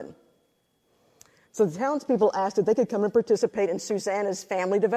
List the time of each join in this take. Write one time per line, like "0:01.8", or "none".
0:01.4